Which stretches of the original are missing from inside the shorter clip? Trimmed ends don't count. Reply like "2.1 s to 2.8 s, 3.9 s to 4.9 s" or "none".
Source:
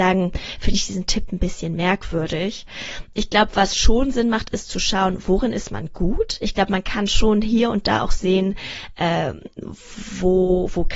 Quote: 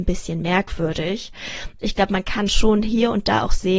3.1 s to 6.4 s